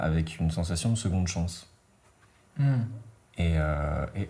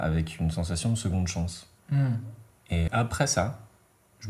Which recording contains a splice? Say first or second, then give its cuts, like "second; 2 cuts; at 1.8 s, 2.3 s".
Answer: second; 2 cuts; at 1.8 s, 2.9 s